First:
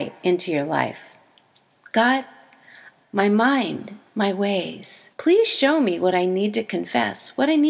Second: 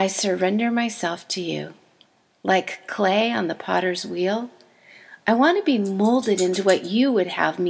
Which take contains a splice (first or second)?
first